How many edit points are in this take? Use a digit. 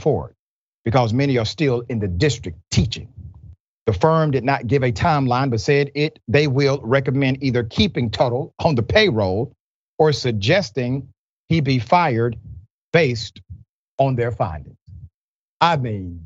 1